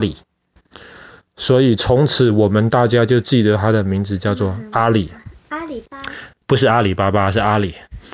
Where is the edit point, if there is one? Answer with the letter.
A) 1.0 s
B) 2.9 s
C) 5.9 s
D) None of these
C